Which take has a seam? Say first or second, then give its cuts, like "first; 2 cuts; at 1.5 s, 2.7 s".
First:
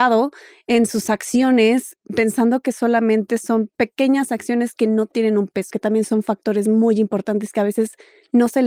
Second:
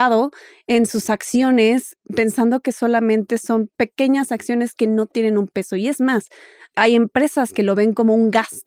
first; 1 cut; at 5.7 s